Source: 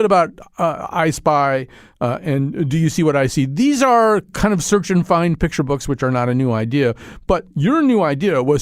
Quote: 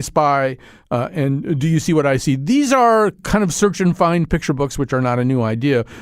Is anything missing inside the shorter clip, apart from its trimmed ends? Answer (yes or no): no